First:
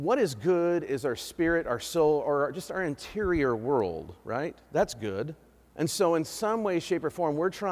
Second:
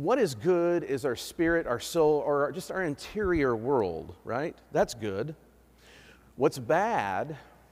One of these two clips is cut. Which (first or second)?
first